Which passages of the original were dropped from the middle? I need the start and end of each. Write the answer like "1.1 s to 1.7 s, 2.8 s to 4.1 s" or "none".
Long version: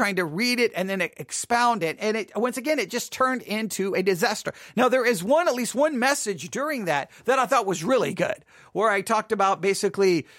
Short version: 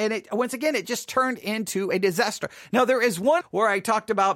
5.4 s to 8.6 s